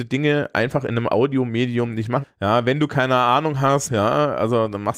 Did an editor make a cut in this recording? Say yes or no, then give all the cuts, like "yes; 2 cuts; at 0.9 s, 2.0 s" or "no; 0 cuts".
yes; 2 cuts; at 2.2 s, 3.9 s